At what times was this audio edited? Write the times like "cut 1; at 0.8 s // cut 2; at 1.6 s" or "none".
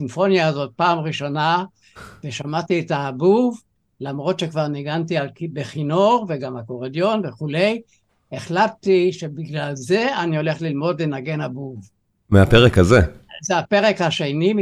none